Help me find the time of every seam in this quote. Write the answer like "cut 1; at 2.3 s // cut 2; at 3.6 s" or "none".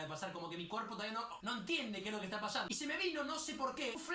cut 1; at 1.4 s